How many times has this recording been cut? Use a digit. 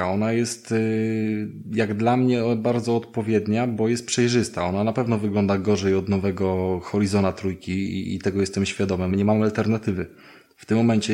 1